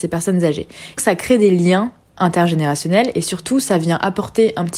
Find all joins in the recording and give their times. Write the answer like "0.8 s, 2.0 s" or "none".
1.0 s